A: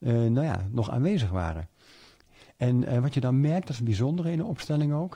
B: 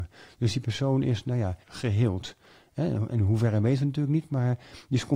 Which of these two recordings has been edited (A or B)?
B